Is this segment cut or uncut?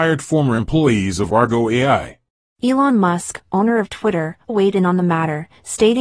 cut